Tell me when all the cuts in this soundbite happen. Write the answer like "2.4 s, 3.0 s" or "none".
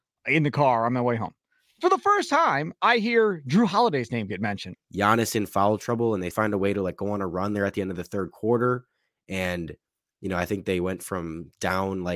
4.8 s, 6.3 s